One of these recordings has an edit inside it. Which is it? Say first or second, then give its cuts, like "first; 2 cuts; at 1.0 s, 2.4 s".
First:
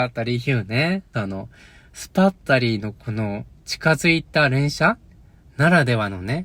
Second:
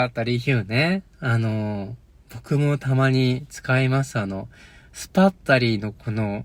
first; 1 cut; at 1.1 s